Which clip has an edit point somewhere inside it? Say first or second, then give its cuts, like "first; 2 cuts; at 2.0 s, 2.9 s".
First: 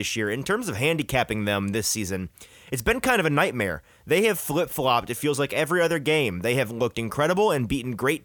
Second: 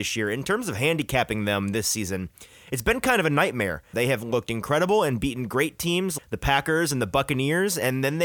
second; 2 cuts; at 3.9 s, 6.2 s